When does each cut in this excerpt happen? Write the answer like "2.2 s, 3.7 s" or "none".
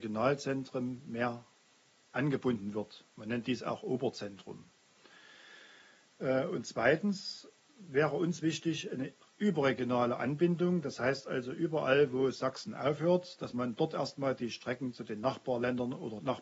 none